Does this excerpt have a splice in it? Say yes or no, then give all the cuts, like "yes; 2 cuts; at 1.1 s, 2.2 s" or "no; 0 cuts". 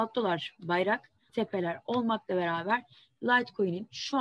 yes; 1 cut; at 1.3 s